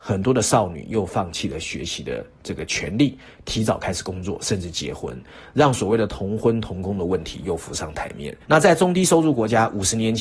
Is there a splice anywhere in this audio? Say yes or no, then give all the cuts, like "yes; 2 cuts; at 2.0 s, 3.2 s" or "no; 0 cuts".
yes; 1 cut; at 8.4 s